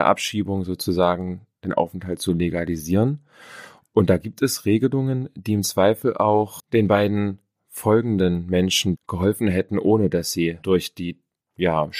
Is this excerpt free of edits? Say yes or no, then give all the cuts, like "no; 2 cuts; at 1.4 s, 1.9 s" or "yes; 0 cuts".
no; 1 cut; at 9.0 s